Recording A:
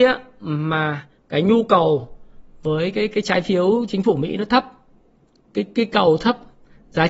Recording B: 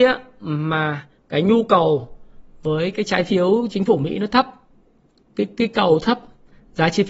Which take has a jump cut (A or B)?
B